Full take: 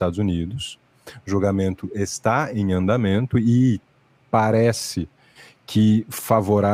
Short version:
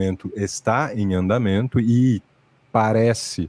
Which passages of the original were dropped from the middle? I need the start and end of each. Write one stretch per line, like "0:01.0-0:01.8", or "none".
none